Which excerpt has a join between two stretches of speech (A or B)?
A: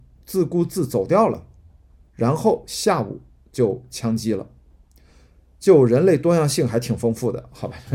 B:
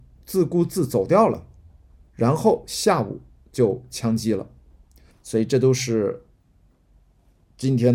B